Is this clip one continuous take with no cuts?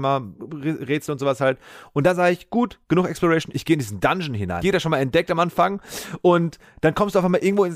no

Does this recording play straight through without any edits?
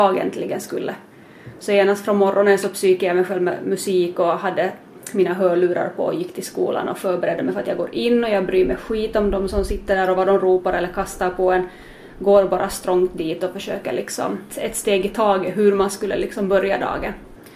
no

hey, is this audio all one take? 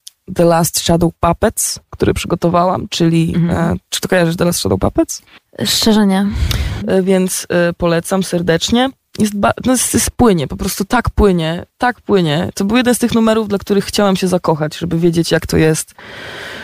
no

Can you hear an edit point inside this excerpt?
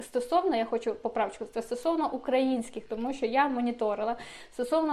no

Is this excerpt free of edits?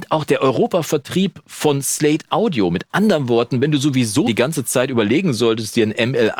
no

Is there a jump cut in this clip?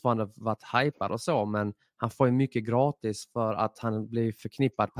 no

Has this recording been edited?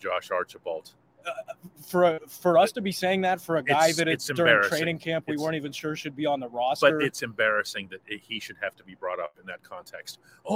no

